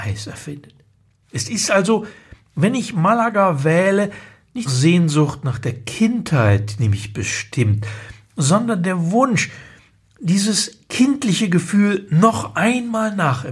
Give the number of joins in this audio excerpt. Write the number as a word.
one